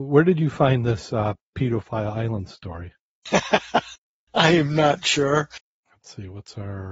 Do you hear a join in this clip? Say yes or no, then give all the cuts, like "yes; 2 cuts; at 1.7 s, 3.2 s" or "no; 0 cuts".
yes; 1 cut; at 5.8 s